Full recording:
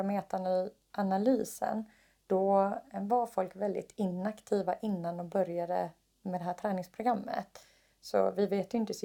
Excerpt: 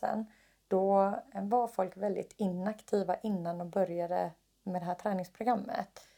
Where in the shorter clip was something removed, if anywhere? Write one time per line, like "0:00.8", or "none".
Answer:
none